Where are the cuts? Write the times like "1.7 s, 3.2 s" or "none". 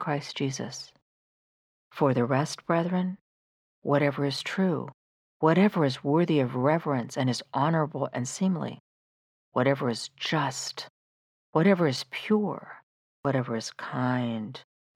13.1 s